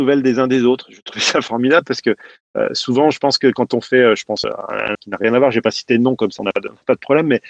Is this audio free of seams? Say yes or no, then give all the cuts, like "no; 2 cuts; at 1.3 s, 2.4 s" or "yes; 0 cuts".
no; 1 cut; at 4.9 s